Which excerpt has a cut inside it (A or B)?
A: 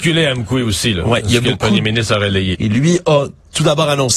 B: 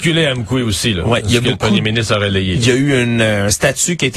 A